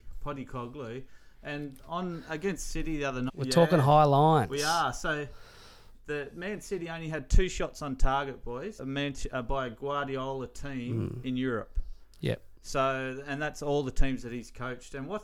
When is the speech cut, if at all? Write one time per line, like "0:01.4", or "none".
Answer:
0:03.3
0:08.8